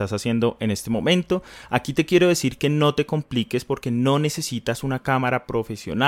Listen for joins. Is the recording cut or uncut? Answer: uncut